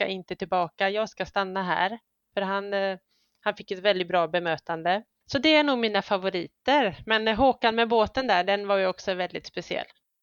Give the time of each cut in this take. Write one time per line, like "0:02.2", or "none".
0:05.2